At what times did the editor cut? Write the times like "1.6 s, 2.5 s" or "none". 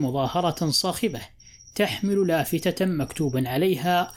none